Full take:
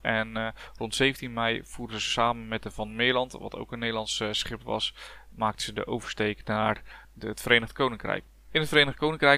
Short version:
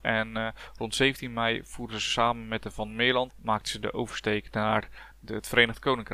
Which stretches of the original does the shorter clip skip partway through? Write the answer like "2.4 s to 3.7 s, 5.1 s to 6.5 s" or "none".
3.3 s to 5.2 s